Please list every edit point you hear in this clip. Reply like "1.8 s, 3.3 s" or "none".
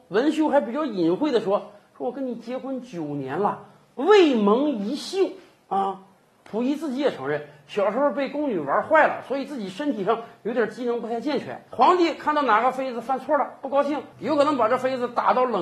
11.7 s, 14.1 s